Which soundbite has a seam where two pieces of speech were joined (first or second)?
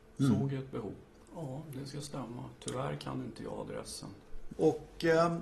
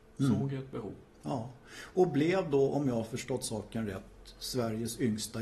first